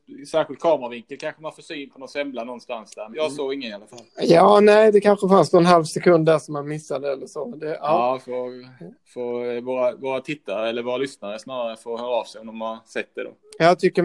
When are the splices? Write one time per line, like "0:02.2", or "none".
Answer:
0:03.1